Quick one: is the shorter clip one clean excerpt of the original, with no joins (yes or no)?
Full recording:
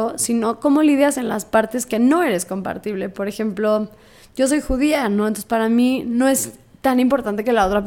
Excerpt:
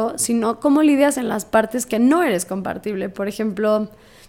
yes